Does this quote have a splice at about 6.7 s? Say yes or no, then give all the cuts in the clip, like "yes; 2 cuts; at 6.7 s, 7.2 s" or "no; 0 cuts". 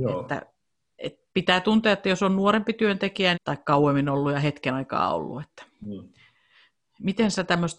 no; 1 cut; at 3.3 s